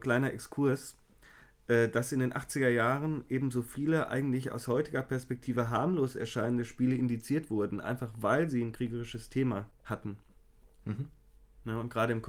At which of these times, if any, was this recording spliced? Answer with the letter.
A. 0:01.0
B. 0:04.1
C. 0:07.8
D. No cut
D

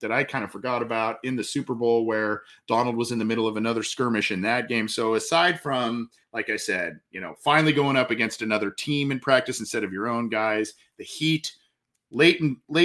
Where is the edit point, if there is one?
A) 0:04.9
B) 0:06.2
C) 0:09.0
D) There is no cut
D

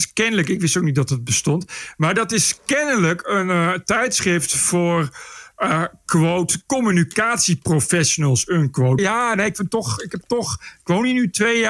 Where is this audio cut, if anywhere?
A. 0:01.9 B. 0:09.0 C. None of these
B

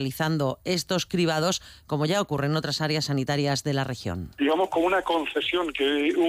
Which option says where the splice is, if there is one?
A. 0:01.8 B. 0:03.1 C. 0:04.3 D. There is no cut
A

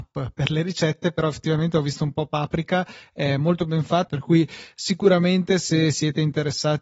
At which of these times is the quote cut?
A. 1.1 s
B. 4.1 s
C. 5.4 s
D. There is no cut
B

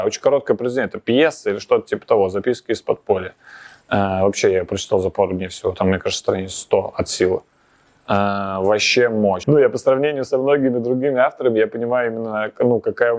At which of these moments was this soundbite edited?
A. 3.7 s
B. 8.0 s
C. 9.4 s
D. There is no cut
C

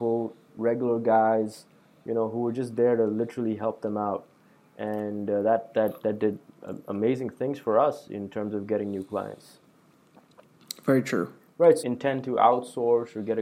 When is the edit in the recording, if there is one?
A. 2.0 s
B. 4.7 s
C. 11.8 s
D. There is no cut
C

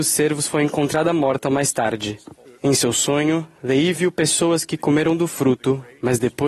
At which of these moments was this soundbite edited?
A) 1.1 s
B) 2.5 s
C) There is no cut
B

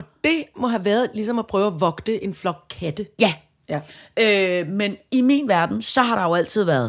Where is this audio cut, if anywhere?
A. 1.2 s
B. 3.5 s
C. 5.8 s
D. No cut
D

